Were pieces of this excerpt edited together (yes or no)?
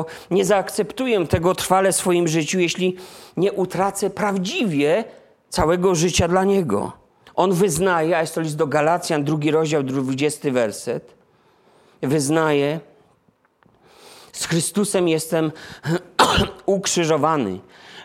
yes